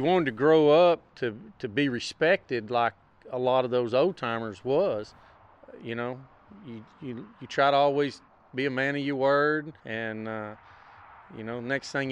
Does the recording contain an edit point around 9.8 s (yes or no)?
yes